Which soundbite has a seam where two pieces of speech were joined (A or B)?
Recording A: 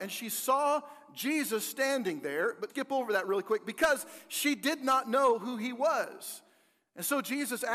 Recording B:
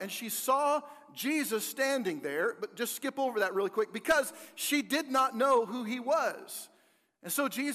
A